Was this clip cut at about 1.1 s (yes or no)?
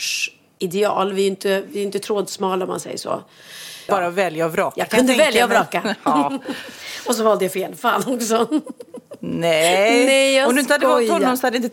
no